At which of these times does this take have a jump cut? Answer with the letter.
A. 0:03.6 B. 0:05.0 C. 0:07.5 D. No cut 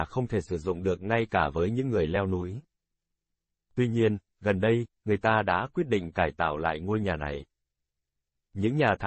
B